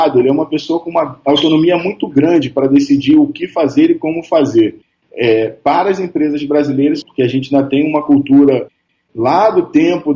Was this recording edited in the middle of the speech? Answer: yes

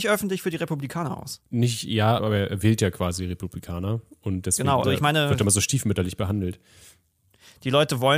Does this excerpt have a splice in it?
yes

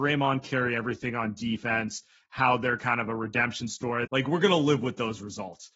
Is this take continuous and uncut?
no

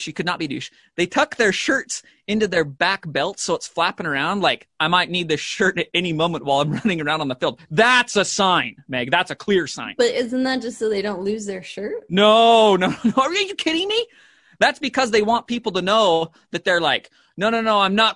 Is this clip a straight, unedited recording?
yes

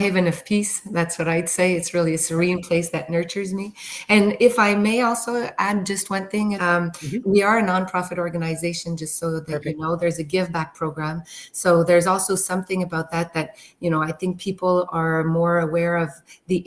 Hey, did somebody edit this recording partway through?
yes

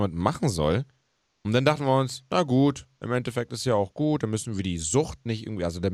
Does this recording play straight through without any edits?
yes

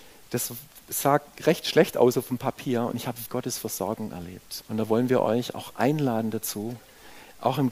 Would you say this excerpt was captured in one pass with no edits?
no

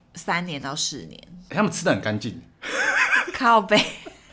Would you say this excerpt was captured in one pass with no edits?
no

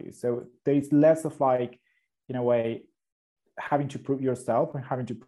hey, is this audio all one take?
yes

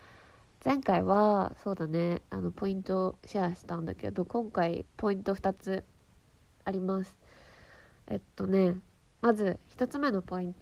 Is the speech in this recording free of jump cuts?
no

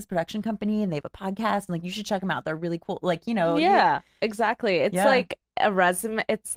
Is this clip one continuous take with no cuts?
yes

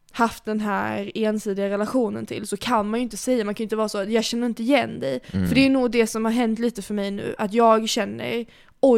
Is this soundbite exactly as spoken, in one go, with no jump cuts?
yes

